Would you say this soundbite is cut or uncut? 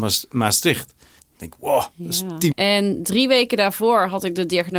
cut